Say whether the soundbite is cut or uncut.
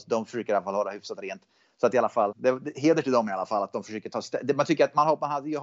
cut